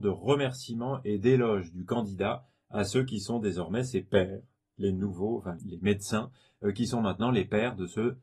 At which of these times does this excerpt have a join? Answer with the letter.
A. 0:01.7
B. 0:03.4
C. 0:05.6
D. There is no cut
C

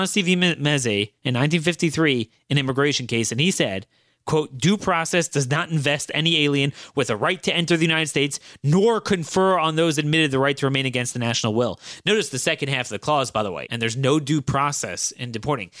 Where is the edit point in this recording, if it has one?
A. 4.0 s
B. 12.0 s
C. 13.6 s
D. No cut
C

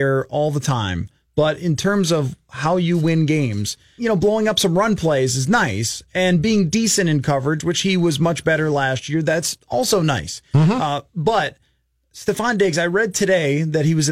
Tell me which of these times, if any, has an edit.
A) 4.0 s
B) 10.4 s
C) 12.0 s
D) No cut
A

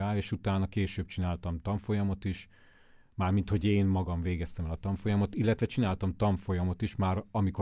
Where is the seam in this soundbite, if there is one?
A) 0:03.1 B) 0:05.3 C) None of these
C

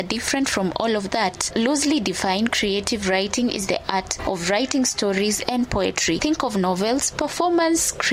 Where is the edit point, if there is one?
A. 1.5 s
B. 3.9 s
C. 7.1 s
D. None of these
C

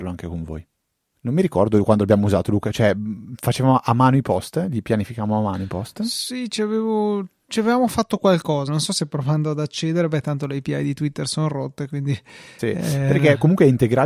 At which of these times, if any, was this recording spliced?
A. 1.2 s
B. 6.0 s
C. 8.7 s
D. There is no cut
C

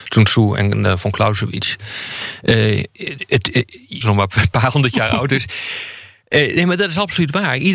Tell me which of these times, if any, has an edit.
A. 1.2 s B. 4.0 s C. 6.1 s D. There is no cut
B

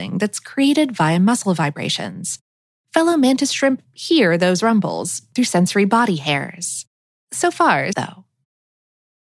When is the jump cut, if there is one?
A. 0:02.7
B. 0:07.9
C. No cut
B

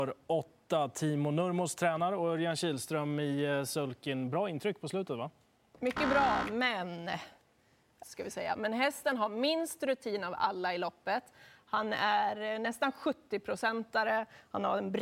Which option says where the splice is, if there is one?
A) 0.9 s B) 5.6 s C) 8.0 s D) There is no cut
C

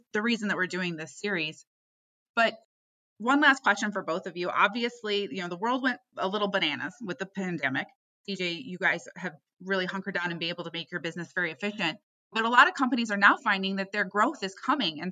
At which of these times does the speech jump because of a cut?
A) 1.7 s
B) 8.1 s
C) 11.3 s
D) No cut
B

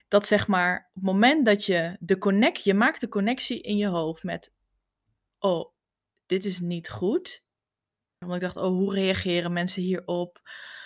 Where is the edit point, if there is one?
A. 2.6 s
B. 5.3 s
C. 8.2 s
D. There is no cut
C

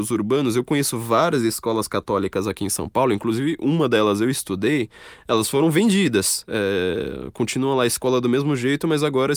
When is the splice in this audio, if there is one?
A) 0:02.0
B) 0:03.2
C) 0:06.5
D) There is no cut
D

